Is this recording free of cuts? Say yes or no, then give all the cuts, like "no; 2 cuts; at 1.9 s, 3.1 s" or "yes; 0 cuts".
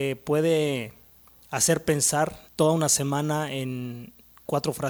no; 1 cut; at 2.5 s